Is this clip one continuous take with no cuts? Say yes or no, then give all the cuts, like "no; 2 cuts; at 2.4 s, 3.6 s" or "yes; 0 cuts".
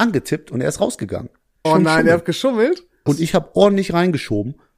no; 2 cuts; at 1.6 s, 3.1 s